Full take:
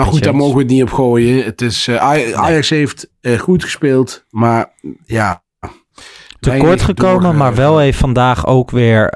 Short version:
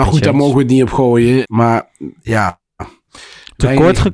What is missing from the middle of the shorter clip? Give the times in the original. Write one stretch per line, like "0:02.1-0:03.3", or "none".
0:01.4-0:04.3